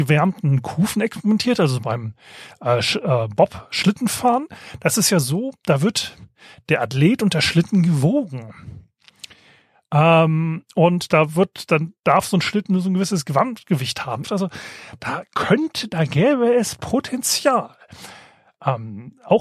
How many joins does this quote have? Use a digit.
1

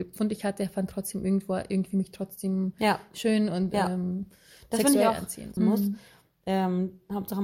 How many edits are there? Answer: 1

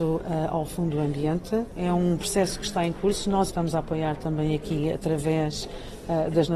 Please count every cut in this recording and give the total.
1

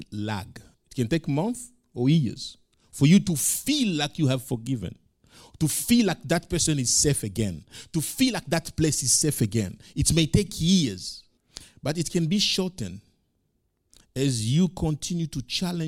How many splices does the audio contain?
0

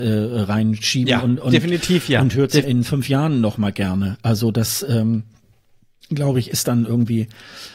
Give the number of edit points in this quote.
1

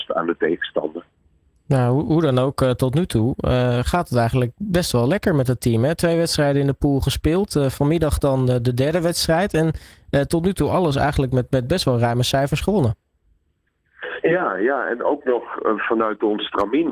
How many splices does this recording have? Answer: 0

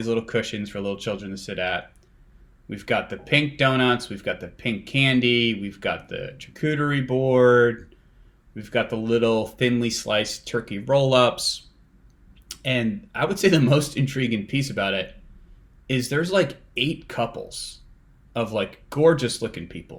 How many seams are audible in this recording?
0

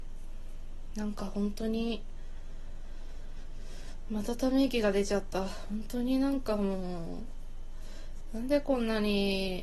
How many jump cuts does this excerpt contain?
1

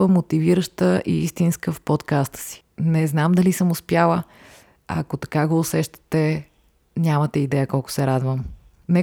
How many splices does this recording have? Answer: 0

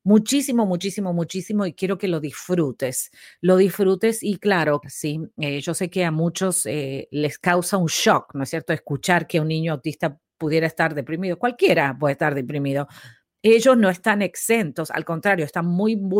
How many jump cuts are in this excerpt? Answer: 1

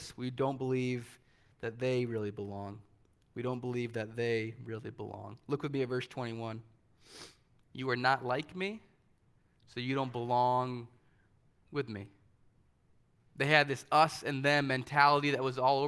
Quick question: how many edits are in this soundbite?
2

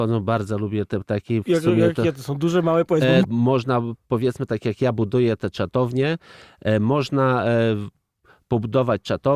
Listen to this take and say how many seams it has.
1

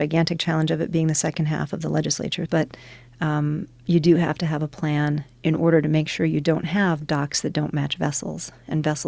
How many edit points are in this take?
1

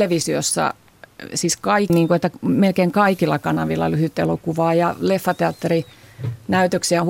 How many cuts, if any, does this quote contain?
1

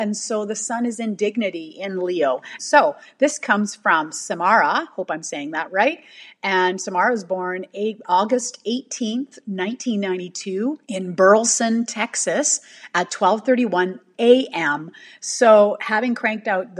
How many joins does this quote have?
2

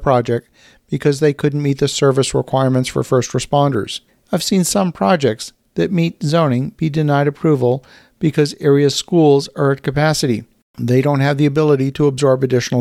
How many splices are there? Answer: 1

